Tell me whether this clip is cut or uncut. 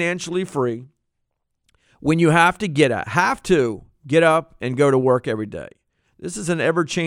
cut